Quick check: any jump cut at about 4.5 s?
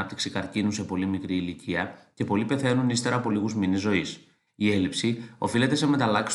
yes; 1 cut; at 4.5 s

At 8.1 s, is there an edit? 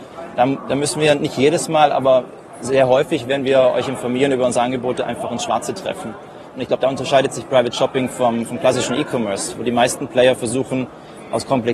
no; 1 cut; at 6.5 s

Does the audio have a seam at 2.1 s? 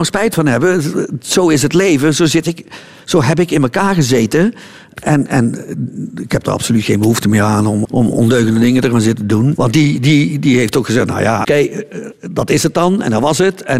no; 3 cuts; at 7.8 s, 9.5 s, 11.4 s

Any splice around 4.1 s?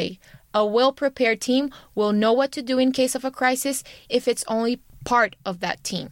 yes; 1 cut; at 4.1 s

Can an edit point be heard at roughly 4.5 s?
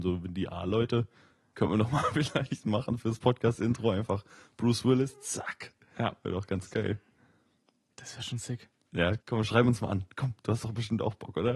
no; 1 cut; at 9.2 s

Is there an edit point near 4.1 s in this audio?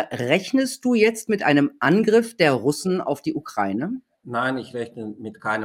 no; 0 cuts

